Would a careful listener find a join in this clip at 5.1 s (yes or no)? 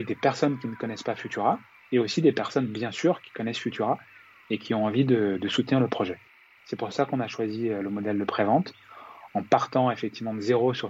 no